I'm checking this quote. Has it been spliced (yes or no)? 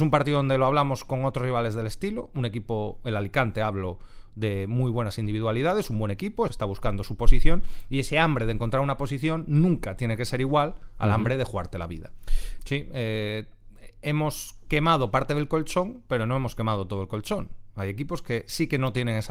yes